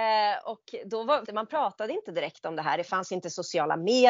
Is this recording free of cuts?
no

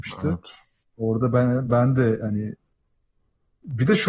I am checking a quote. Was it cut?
no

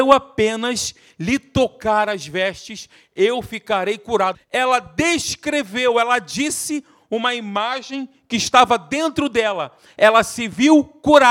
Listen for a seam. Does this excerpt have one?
yes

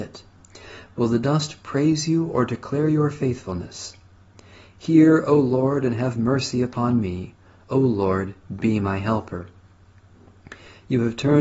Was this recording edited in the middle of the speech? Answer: no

